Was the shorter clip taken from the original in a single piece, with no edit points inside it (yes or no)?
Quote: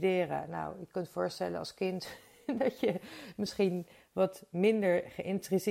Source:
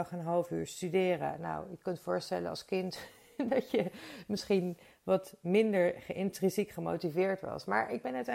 yes